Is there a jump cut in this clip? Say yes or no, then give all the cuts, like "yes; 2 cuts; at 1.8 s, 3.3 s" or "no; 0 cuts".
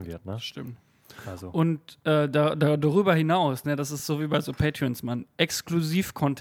no; 0 cuts